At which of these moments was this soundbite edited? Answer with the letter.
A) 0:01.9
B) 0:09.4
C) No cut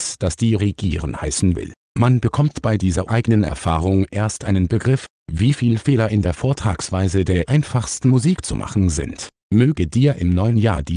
B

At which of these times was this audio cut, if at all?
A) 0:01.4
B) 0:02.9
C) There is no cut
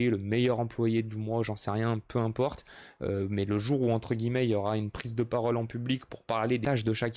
C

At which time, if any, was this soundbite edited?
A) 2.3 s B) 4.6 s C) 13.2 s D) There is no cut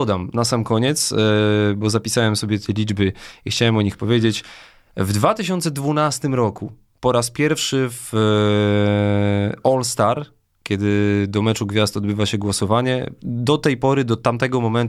C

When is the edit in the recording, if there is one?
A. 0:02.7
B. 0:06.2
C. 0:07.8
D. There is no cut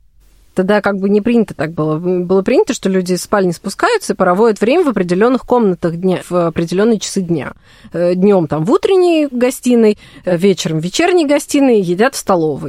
B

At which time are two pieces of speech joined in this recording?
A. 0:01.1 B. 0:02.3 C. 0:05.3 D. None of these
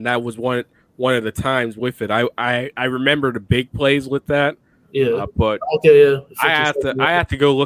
C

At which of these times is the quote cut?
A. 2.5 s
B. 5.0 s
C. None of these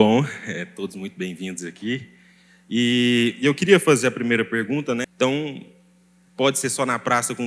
B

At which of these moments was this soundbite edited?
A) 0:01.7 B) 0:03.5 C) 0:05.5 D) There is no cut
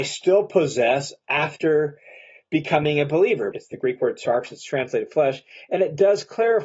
B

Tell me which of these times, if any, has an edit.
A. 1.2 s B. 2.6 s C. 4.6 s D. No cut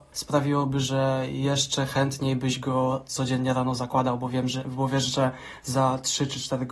D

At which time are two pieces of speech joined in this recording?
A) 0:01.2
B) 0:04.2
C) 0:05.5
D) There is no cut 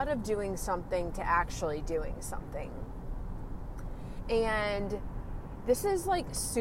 B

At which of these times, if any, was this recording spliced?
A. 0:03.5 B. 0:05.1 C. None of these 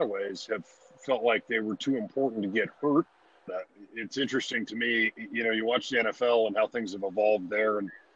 A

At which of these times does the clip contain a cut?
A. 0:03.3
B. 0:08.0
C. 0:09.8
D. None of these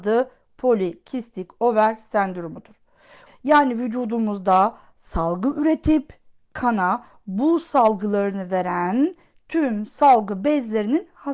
A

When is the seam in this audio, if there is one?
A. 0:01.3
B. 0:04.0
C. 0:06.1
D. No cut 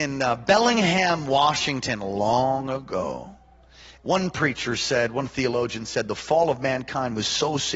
B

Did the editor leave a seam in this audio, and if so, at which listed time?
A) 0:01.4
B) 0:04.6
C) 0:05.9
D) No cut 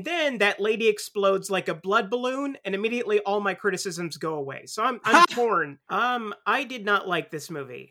C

